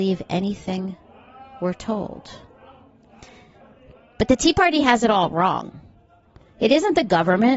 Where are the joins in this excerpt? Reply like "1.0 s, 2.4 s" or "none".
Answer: none